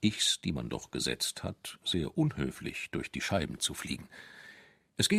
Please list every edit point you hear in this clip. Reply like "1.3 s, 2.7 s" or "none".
none